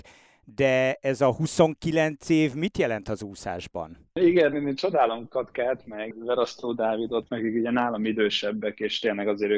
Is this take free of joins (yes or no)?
no